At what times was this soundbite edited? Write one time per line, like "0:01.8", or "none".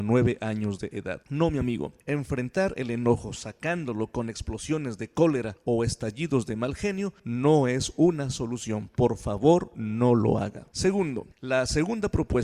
none